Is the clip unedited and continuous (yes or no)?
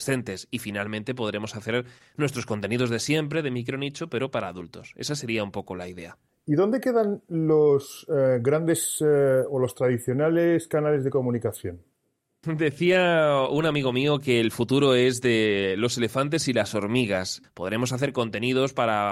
no